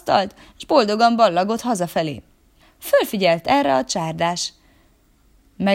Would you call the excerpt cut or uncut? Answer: cut